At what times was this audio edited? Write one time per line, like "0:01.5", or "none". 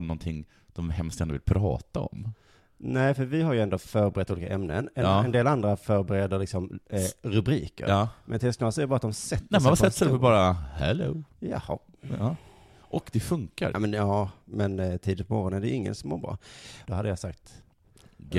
0:13.7
0:16.8